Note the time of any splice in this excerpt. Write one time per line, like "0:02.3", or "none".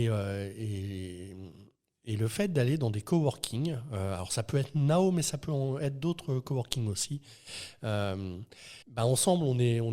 0:08.8